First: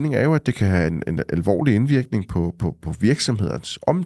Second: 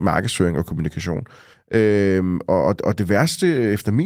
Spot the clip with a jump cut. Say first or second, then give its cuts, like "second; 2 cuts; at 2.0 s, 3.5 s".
second; 1 cut; at 1.5 s